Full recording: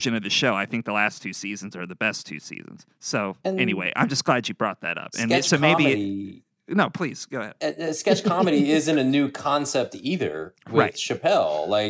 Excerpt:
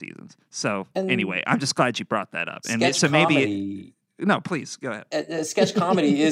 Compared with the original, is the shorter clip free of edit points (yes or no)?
yes